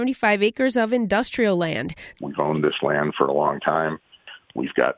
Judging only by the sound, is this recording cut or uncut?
cut